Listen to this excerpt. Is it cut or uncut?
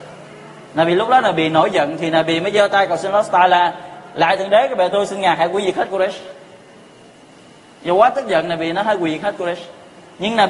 uncut